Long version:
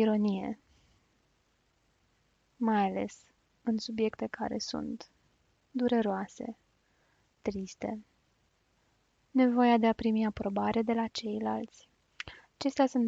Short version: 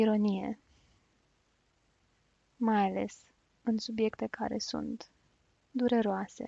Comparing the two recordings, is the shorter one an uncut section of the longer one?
yes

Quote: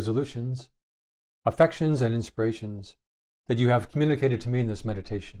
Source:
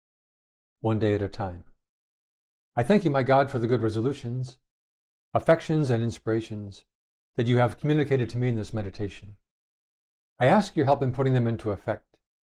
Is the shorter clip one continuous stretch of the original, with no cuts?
yes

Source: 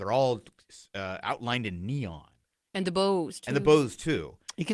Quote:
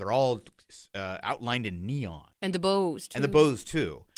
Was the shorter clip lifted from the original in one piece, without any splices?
no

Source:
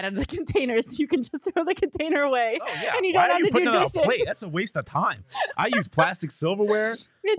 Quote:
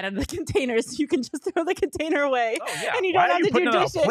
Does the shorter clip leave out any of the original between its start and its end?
no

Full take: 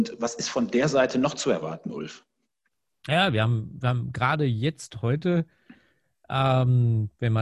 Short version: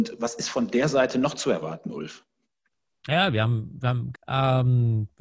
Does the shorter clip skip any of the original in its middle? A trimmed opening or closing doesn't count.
yes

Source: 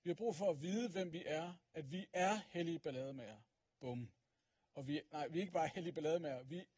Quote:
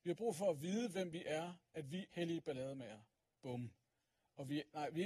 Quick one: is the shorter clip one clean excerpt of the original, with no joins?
no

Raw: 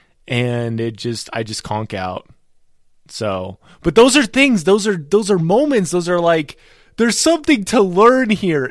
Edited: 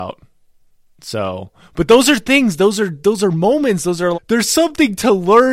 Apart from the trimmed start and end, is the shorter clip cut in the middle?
yes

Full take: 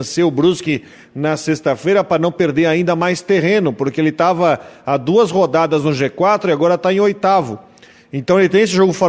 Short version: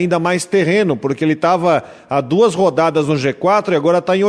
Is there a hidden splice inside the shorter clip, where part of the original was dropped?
no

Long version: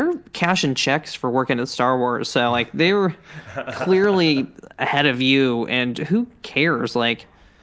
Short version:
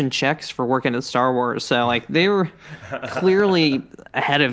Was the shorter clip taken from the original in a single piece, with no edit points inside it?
yes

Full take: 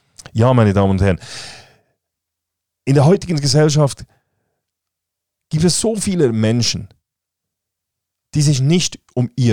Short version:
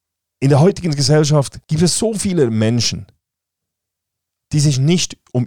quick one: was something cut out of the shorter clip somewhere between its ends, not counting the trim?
yes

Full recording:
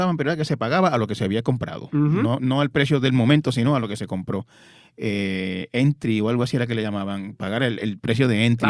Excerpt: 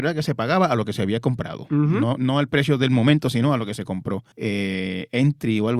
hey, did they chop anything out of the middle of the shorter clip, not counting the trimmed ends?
yes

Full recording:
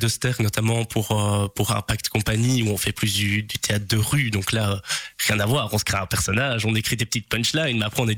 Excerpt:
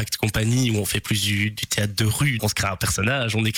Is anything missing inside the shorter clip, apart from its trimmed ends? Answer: yes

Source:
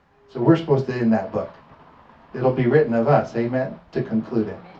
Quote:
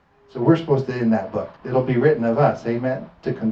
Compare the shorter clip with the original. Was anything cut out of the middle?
yes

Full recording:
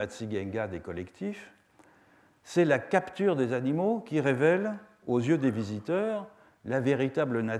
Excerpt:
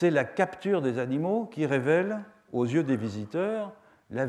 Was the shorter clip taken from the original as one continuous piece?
yes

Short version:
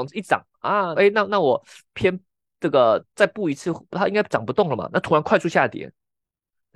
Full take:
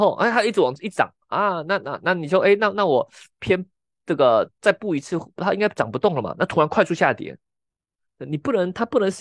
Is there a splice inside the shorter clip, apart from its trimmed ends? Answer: yes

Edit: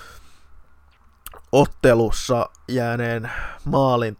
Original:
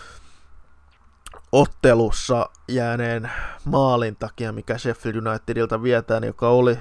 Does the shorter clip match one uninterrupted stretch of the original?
yes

